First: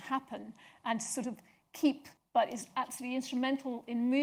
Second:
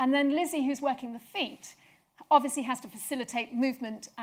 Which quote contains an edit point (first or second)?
first